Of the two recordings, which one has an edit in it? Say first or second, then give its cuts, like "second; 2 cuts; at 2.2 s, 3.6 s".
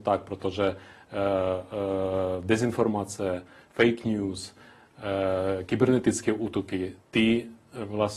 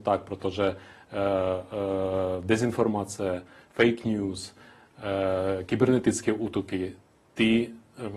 first; 1 cut; at 7.0 s